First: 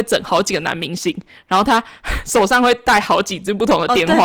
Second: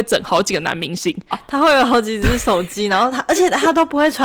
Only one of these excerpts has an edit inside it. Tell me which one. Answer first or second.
second